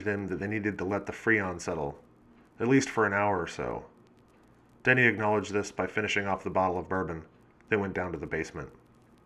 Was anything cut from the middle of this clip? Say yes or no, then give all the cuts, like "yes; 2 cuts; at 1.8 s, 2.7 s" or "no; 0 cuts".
no; 0 cuts